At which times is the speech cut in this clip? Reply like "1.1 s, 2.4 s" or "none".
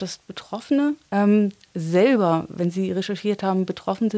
1.0 s